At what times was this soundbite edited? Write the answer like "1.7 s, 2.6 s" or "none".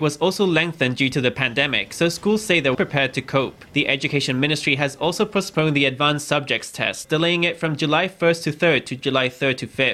2.7 s, 7.0 s